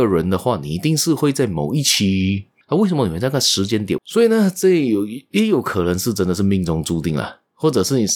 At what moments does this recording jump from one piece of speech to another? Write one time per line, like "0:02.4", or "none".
0:02.6
0:04.0